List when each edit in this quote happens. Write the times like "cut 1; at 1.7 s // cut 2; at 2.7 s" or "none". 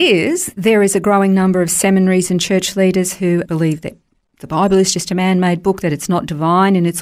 cut 1; at 3.4 s